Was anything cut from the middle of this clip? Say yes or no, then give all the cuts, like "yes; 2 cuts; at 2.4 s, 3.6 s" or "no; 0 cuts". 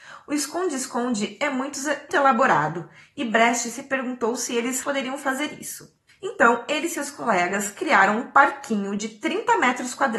yes; 2 cuts; at 2.1 s, 4.8 s